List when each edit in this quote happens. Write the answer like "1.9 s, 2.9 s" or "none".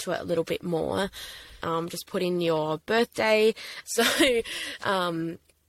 1.6 s, 3.8 s